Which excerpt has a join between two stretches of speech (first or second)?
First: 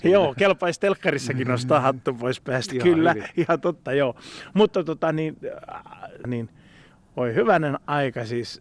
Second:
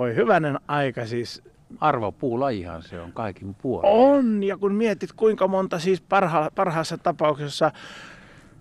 first